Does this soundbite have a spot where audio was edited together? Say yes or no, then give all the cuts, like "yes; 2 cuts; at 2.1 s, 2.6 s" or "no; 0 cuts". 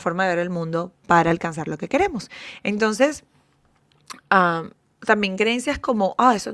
no; 0 cuts